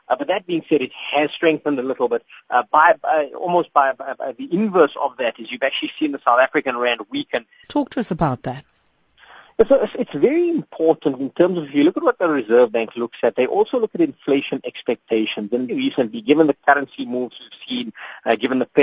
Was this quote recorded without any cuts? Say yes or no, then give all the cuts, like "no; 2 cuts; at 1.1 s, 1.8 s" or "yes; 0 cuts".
no; 2 cuts; at 7.6 s, 15.7 s